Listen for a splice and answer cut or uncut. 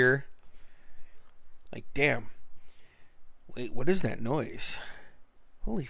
cut